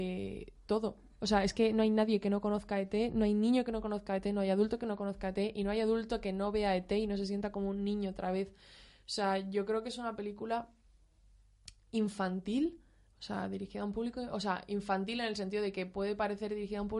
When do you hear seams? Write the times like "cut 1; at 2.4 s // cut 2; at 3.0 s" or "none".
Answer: none